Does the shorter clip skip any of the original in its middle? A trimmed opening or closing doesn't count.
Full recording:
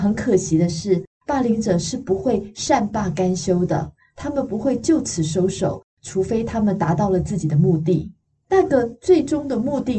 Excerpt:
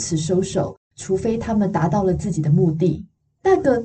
no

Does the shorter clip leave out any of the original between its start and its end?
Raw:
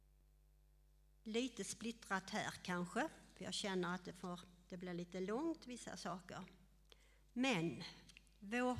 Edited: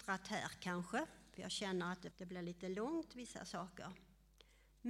yes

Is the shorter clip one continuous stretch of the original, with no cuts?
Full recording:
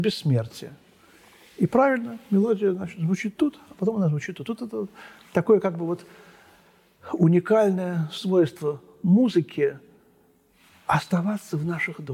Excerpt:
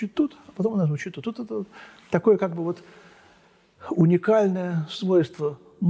yes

